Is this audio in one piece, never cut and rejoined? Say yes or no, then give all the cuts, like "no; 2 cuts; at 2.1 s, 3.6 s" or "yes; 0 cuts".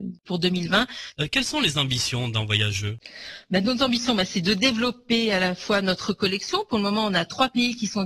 no; 1 cut; at 1.1 s